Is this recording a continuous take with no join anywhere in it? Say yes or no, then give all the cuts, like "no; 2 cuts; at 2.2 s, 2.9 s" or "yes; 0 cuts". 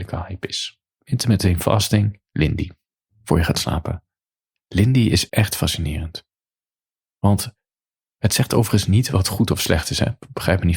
no; 1 cut; at 5.3 s